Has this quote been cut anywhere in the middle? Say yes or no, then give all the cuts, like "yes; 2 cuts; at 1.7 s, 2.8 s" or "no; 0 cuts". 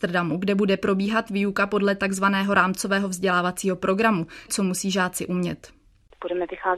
yes; 1 cut; at 4.5 s